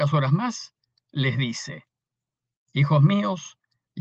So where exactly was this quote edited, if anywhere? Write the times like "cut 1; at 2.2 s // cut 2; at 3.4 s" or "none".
none